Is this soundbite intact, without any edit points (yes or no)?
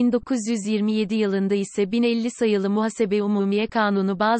yes